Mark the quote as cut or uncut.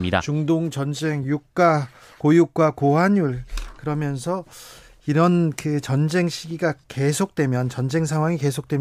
uncut